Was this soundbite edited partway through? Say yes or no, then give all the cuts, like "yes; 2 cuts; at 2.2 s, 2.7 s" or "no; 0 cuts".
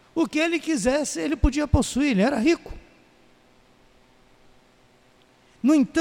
no; 0 cuts